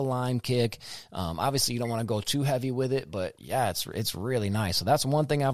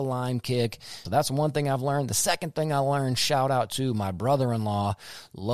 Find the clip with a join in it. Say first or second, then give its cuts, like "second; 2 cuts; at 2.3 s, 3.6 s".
second; 1 cut; at 1.1 s